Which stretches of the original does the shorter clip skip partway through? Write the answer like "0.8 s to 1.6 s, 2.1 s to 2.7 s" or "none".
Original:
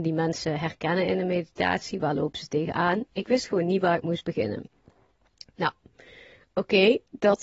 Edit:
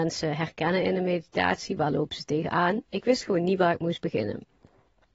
none